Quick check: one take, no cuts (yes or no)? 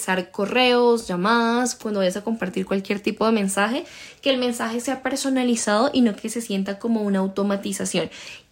yes